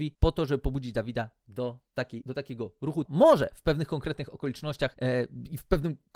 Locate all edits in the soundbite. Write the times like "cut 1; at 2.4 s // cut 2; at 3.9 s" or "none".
cut 1; at 3.1 s